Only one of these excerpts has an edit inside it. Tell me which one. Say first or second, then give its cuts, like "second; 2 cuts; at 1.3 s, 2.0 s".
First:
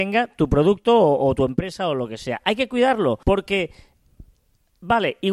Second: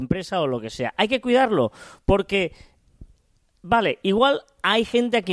first; 1 cut; at 3.2 s